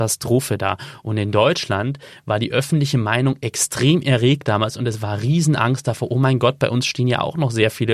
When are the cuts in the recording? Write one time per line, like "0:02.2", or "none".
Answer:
none